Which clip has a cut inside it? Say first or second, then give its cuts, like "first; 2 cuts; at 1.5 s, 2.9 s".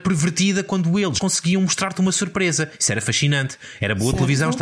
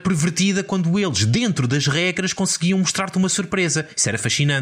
first; 1 cut; at 1.2 s